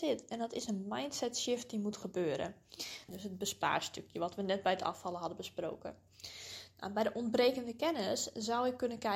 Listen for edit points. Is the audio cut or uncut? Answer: cut